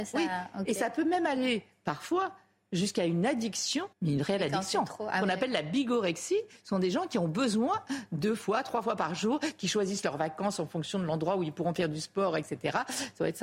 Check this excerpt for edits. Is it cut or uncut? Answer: cut